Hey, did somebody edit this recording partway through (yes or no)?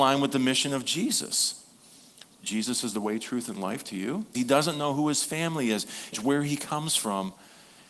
yes